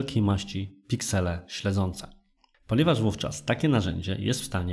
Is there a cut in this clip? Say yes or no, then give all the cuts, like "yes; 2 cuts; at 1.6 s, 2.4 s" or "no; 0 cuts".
yes; 1 cut; at 2.5 s